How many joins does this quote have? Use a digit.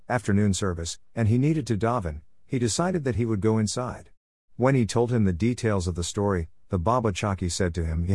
1